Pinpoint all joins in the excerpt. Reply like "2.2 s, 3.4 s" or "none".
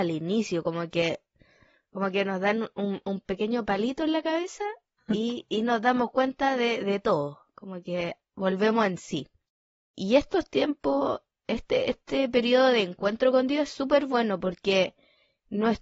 none